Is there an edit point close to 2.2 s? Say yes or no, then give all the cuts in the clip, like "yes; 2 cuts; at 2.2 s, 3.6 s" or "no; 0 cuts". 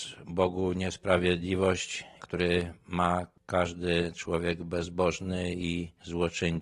yes; 1 cut; at 2.2 s